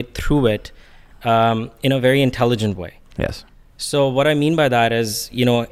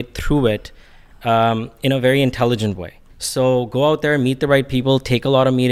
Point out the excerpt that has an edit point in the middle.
second; 1 cut; at 3.1 s

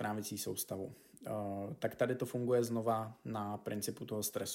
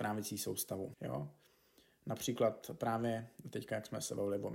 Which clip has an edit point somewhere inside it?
second; 1 cut; at 0.9 s

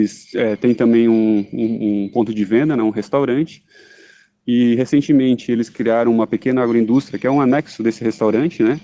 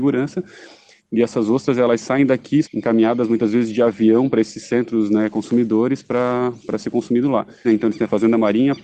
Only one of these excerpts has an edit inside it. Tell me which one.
second; 3 cuts; at 1.0 s, 2.6 s, 7.6 s

